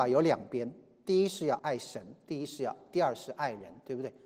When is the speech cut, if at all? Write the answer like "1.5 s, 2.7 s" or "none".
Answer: 1.6 s